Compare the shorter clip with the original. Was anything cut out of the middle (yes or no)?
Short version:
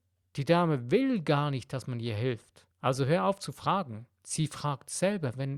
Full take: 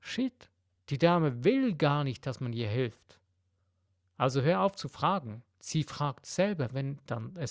yes